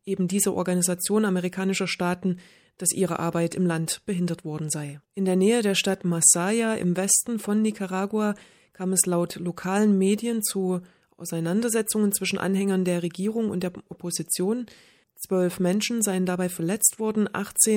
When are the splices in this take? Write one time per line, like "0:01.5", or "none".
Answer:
0:05.0

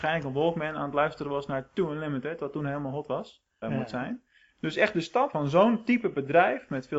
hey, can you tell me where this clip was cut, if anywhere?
0:03.6
0:05.3

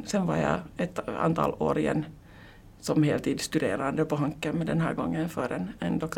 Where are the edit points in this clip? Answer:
none

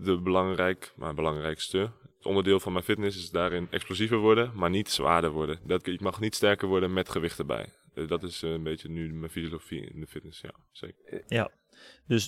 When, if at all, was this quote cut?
0:05.8
0:11.2

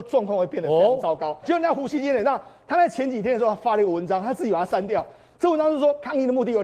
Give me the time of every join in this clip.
0:01.4

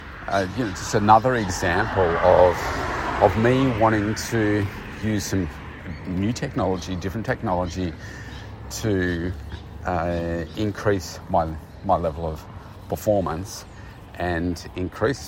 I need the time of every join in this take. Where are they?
none

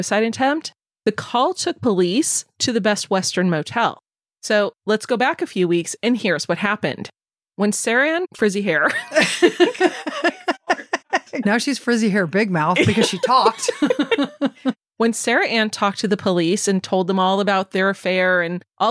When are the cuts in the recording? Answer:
none

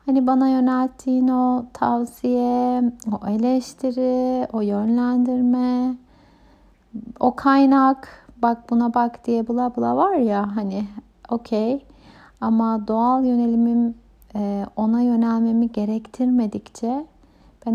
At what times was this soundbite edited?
none

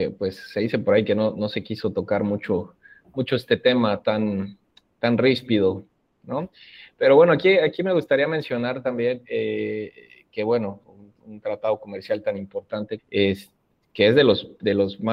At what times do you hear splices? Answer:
0:10.8
0:13.0

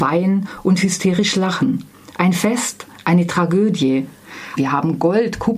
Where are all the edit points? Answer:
0:04.6

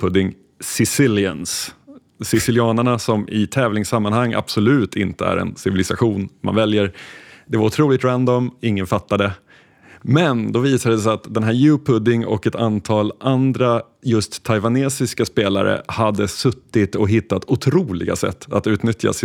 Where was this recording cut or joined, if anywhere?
none

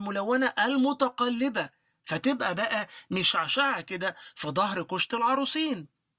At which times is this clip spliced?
none

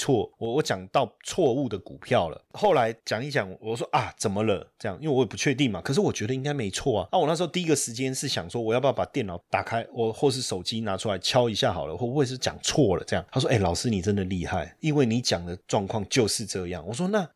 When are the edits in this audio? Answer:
none

